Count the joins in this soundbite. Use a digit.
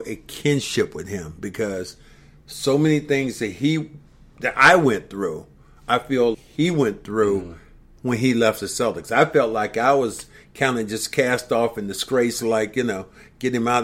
1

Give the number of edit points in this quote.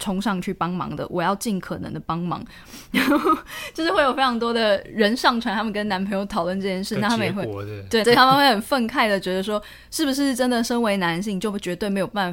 2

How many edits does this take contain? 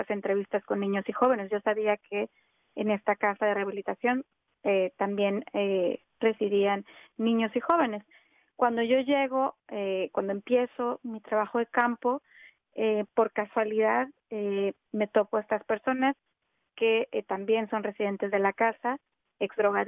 0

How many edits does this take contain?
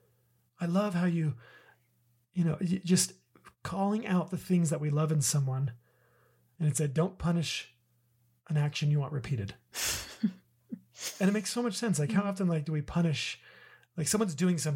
1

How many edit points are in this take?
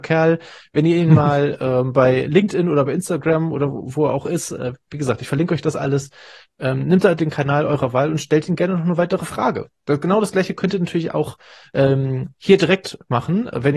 0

